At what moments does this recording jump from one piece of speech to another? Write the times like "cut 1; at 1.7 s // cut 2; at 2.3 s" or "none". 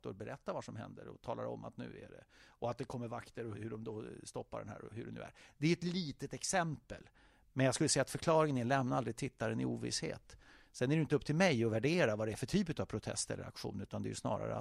cut 1; at 3.5 s